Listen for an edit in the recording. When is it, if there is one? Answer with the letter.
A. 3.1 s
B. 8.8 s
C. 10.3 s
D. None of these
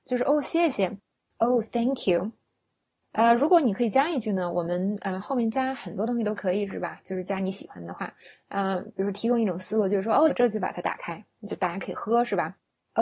C